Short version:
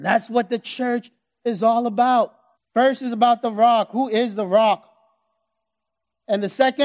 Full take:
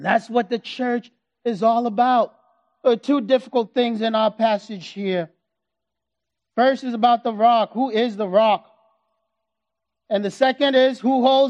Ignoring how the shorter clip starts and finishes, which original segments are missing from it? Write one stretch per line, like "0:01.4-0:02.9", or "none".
0:02.5-0:06.4